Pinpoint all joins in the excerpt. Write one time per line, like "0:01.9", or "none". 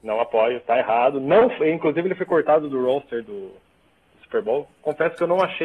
none